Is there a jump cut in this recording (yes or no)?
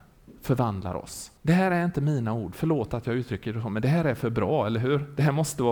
yes